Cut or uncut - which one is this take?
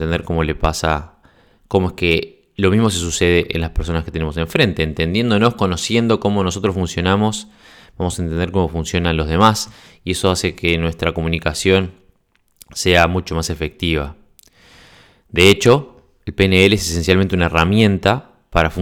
uncut